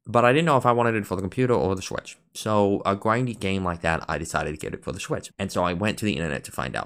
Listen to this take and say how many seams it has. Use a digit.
1